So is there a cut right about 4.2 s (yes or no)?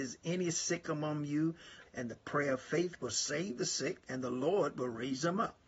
no